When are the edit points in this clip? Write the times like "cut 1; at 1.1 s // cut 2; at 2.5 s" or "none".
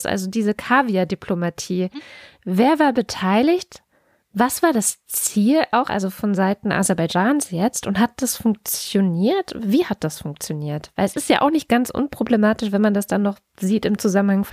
none

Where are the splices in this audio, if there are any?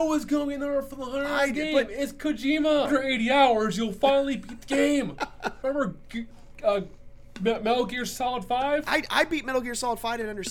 cut 1; at 2.8 s // cut 2; at 5.6 s

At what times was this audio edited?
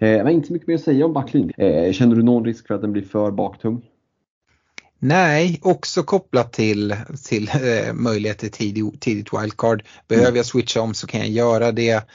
cut 1; at 1.5 s

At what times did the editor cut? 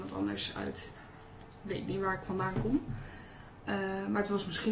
none

